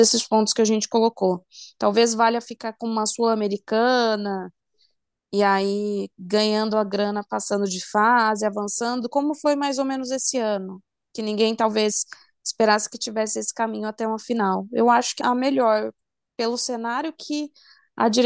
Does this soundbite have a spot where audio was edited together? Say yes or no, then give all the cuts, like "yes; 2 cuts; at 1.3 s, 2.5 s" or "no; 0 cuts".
yes; 1 cut; at 15.2 s